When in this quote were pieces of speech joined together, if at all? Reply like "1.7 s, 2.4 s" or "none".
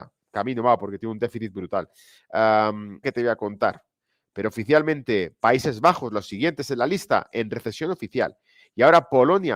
3.0 s